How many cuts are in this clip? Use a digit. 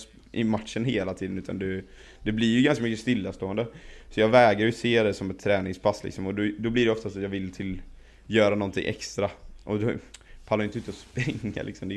0